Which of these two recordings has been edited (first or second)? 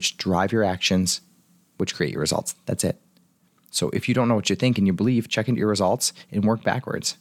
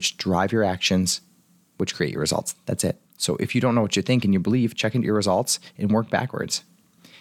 second